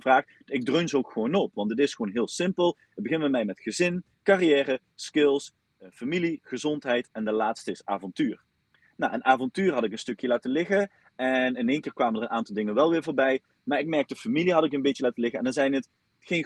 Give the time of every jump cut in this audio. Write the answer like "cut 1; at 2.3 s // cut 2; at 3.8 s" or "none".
none